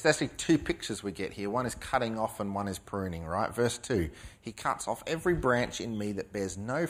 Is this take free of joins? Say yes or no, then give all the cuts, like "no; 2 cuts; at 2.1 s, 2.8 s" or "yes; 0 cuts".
yes; 0 cuts